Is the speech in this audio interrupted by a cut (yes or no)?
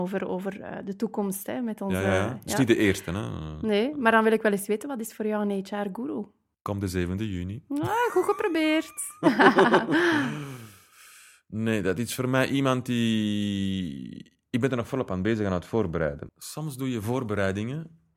yes